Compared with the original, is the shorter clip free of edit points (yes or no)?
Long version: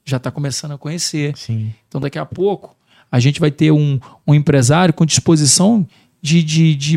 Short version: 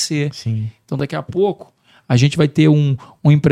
yes